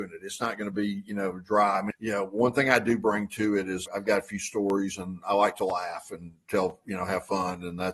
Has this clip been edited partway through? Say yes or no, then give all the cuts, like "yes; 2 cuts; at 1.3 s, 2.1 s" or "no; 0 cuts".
yes; 2 cuts; at 1.9 s, 3.9 s